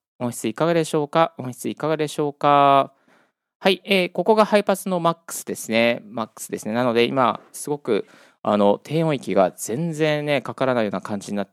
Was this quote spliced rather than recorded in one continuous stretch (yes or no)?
no